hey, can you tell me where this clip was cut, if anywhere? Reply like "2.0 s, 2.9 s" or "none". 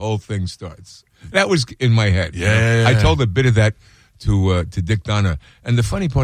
none